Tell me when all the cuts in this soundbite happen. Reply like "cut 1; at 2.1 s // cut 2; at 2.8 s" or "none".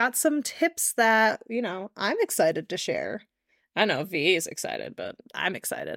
none